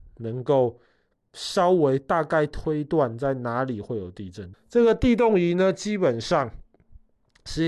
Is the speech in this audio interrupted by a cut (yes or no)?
yes